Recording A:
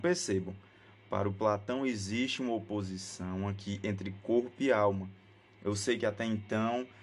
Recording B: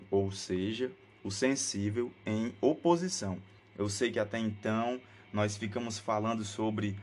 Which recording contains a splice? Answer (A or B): B